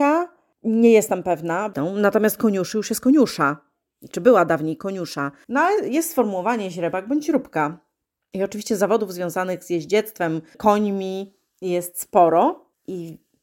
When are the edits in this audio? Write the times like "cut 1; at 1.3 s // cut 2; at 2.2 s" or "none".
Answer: cut 1; at 5.4 s